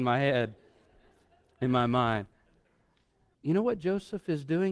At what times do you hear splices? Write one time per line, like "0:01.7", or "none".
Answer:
0:03.3